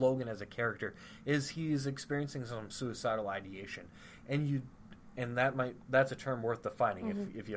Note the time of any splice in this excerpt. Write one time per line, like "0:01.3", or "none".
none